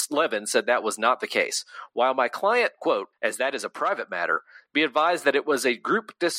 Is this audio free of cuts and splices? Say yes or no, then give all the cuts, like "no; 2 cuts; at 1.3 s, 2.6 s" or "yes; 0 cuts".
no; 1 cut; at 3.1 s